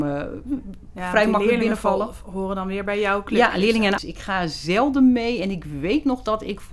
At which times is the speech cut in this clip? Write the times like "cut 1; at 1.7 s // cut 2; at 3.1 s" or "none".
cut 1; at 4.0 s

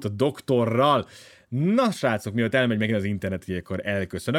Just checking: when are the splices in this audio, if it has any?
none

